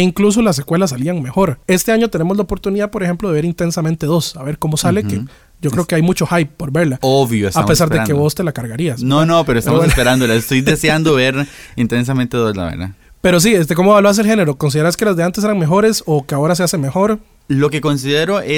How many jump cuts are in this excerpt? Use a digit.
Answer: 1